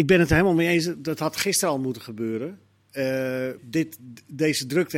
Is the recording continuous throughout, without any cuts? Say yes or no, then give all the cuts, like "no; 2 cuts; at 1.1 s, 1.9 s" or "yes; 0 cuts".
no; 1 cut; at 3.6 s